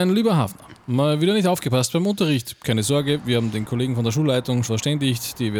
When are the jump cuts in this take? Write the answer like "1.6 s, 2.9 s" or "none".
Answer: 4.7 s